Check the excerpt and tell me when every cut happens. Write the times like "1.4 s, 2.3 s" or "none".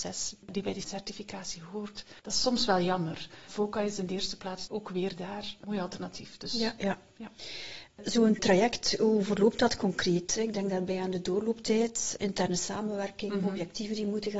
none